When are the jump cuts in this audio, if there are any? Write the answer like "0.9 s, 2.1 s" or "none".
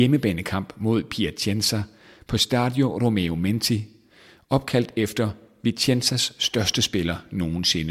none